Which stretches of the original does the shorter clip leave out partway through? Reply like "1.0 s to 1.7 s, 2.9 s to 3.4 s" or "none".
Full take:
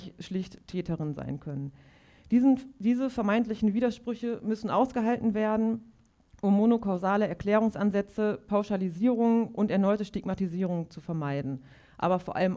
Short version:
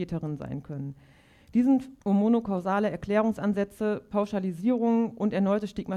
2.8 s to 6.4 s